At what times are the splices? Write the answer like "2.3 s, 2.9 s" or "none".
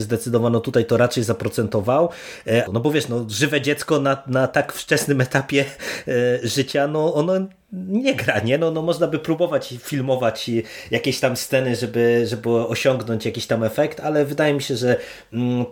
2.7 s